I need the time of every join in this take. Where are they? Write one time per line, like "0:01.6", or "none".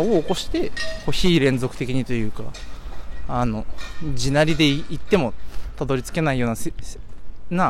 none